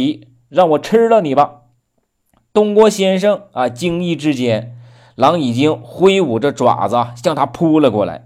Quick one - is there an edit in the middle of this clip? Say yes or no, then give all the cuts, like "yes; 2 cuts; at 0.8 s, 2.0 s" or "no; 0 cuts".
no; 0 cuts